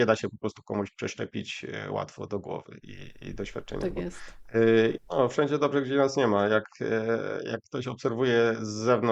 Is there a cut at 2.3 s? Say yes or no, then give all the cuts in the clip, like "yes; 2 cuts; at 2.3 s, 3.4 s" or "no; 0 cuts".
yes; 2 cuts; at 2.3 s, 5.0 s